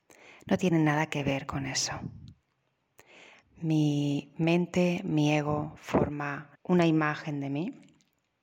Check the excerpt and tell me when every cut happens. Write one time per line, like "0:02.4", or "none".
0:03.4
0:06.5